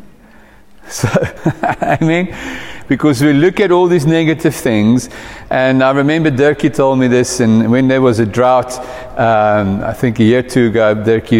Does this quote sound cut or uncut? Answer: cut